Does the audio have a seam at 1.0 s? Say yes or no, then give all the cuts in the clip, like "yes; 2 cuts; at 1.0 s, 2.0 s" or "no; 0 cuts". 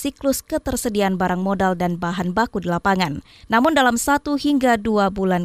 no; 1 cut; at 3.4 s